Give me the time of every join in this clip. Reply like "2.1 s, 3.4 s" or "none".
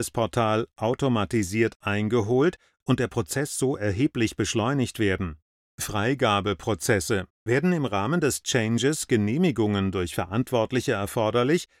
5.6 s, 7.3 s

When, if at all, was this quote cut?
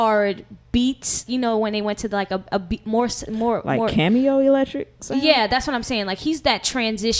1.3 s

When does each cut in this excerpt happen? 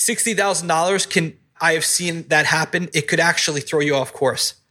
none

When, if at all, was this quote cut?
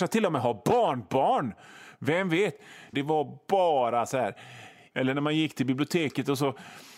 2.9 s, 4.9 s

